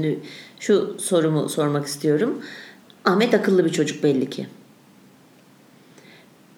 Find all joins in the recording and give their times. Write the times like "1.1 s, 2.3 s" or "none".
2.8 s